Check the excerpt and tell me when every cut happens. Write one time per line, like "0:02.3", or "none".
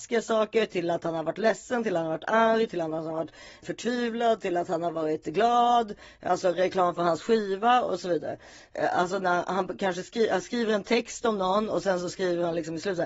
none